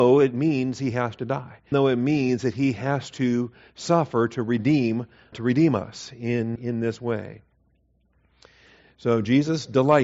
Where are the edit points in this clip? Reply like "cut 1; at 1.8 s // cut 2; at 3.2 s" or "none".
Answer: cut 1; at 1.7 s // cut 2; at 5.3 s // cut 3; at 6.6 s